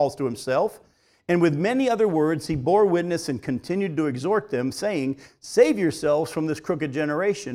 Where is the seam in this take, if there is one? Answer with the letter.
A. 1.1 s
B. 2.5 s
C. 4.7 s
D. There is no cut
D